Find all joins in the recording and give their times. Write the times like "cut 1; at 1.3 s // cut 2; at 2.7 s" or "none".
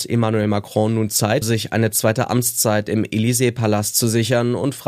cut 1; at 1.4 s